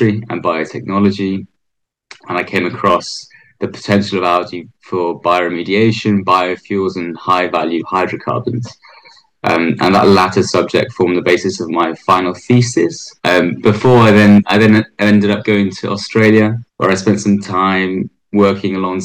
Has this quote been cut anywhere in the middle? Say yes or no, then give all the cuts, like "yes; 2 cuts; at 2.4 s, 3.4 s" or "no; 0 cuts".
yes; 2 cuts; at 13.2 s, 16.7 s